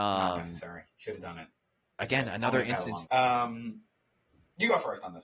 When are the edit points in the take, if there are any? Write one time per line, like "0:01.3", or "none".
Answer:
0:03.1